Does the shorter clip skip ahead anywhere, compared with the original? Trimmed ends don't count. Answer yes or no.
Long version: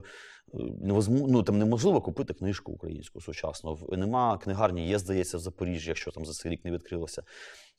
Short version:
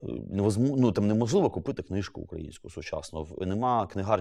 no